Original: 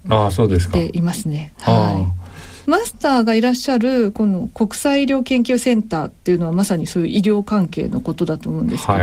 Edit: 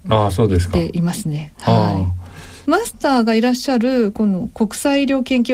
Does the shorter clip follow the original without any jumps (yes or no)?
yes